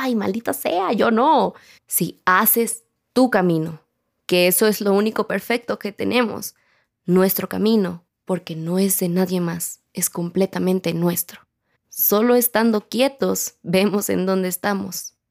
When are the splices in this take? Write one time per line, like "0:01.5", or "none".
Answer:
0:01.8
0:11.7

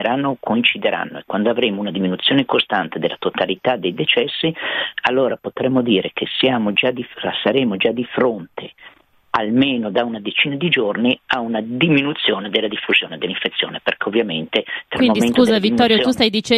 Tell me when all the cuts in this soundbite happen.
none

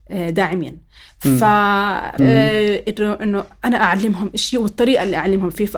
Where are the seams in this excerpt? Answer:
0:02.2

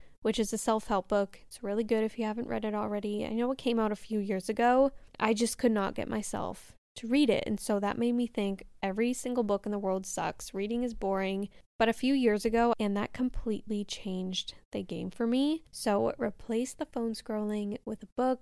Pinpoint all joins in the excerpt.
0:05.1
0:12.7
0:15.7

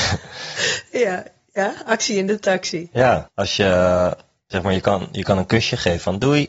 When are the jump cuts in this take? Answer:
0:03.3

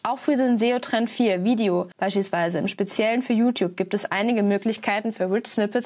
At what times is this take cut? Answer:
none

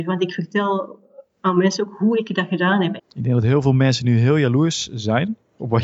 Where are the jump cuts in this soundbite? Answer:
0:03.0

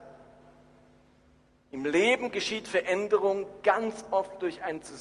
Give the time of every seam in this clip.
none

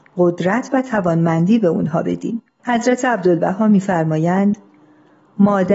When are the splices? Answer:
0:02.5

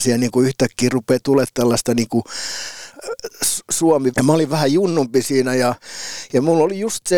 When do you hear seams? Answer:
0:04.1

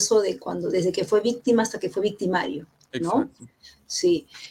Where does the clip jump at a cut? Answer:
none

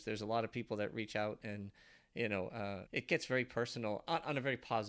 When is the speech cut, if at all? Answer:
0:02.9

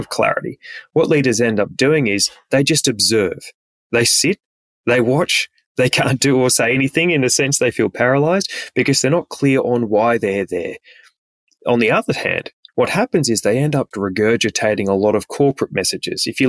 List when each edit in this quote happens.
0:12.7
0:13.9

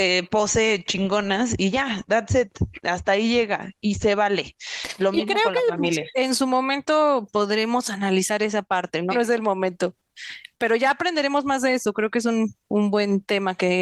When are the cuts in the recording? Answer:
0:09.1

